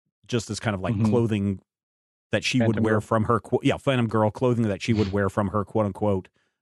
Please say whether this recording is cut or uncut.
uncut